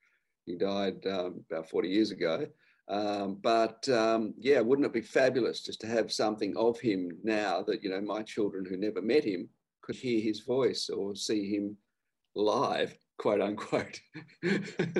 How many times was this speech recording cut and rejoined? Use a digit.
1